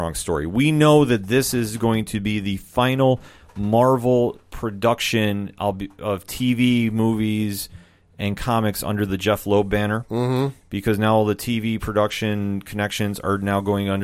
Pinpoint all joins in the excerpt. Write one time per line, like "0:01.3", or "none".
none